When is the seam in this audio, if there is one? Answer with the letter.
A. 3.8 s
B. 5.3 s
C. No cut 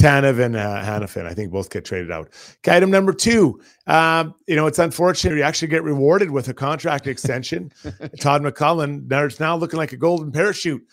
B